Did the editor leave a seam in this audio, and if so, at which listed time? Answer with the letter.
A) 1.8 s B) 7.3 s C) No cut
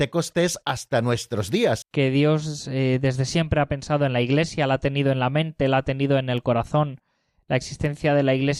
A